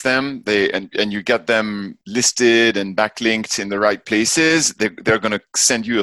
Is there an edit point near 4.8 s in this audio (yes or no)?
no